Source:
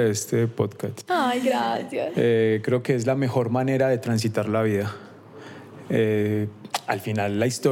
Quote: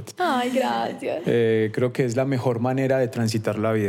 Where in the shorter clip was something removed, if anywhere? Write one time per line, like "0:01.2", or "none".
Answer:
none